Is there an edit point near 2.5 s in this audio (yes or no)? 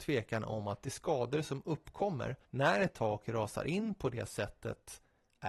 yes